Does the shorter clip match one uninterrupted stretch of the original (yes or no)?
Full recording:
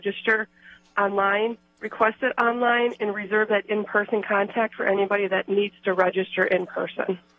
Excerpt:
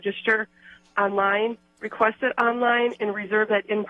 yes